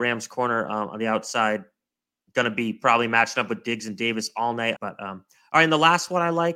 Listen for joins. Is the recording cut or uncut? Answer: cut